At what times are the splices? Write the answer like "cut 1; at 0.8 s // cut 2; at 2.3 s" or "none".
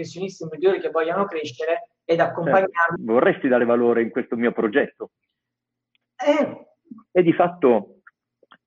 cut 1; at 3.0 s // cut 2; at 7.1 s

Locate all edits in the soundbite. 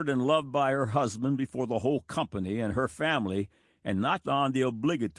cut 1; at 4.2 s

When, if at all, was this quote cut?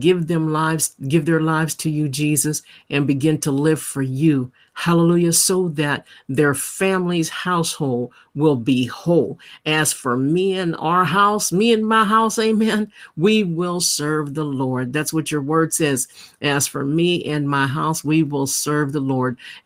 none

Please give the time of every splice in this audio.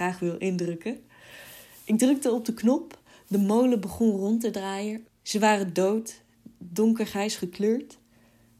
cut 1; at 5.0 s

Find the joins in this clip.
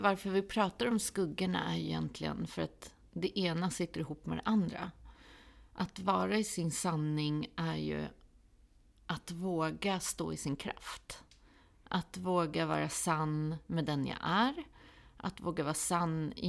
none

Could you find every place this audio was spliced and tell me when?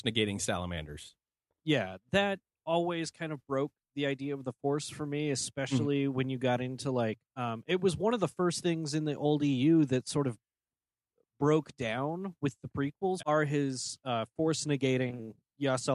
cut 1; at 7.3 s // cut 2; at 13.2 s

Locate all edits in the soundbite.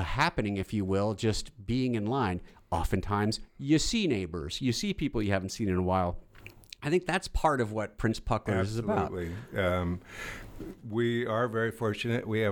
none

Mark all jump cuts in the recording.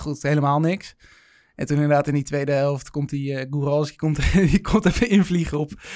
none

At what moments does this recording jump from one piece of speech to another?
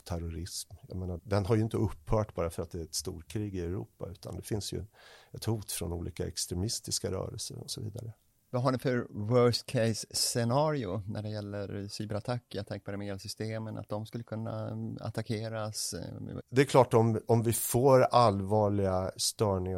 cut 1; at 1.2 s // cut 2; at 16.4 s

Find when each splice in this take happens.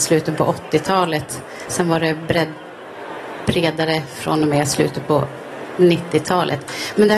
none

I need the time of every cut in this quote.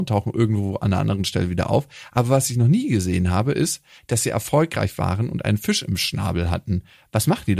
none

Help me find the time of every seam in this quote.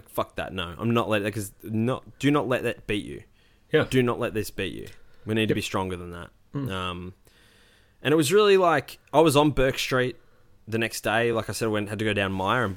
none

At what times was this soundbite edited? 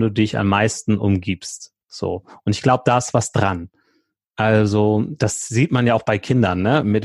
cut 1; at 1.8 s

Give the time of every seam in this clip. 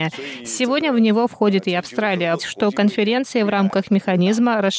cut 1; at 2.4 s

